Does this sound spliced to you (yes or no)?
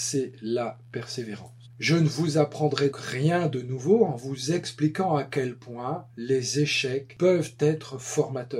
yes